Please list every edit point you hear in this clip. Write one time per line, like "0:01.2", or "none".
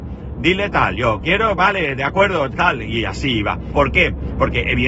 0:02.5
0:03.7